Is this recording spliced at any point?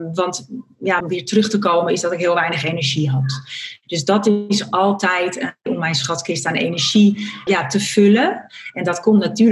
yes; 3 cuts; at 1.0 s, 5.7 s, 7.5 s

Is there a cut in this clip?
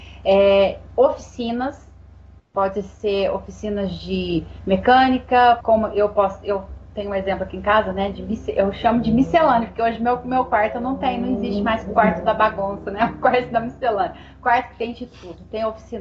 yes; 1 cut; at 5.6 s

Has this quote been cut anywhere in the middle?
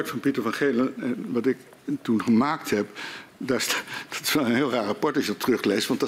yes; 1 cut; at 1.0 s

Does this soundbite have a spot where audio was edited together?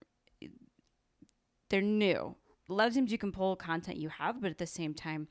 no; 0 cuts

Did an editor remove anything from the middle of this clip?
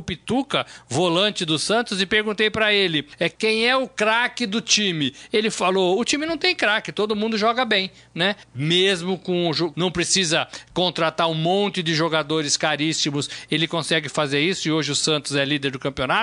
yes; 2 cuts; at 8.4 s, 9.7 s

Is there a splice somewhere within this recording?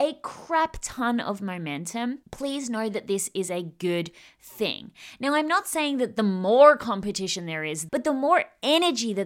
yes; 2 cuts; at 2.2 s, 7.9 s

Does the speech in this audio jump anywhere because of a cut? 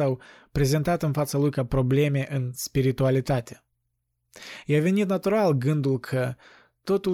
no; 0 cuts

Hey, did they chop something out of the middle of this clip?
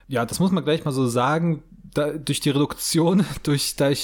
no; 0 cuts

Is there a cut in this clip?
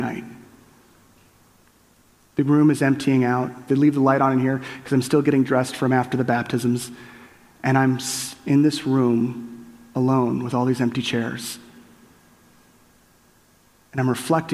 yes; 1 cut; at 3.7 s

